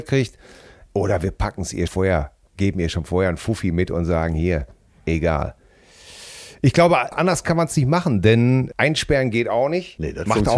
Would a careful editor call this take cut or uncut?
cut